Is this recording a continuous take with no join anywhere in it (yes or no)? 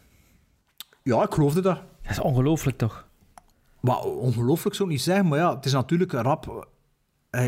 yes